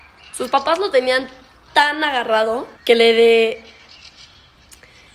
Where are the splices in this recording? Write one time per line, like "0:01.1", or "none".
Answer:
0:01.7
0:02.8